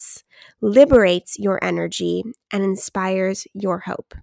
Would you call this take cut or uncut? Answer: uncut